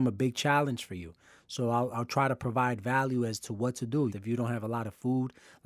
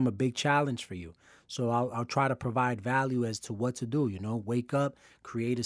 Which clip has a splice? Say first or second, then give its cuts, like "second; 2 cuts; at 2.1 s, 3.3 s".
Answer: first; 1 cut; at 4.1 s